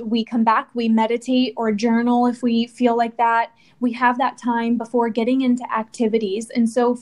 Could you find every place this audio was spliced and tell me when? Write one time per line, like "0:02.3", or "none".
none